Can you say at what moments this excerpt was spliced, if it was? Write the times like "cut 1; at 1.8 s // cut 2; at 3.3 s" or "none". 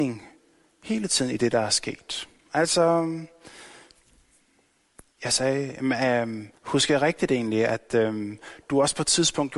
cut 1; at 6.6 s